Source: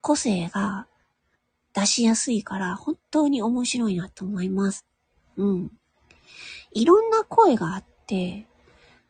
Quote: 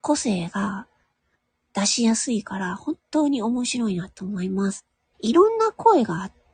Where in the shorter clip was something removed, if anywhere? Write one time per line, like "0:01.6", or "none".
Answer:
0:05.1